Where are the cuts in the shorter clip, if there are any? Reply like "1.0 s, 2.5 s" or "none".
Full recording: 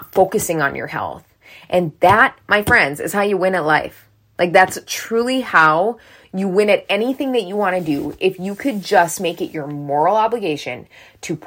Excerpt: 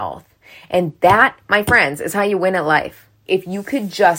3.3 s